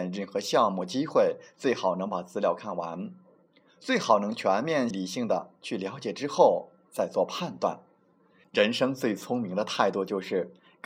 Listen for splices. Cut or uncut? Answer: cut